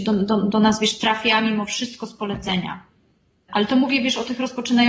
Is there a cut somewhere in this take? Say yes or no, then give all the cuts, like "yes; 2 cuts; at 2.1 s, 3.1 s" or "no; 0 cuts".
yes; 1 cut; at 3.5 s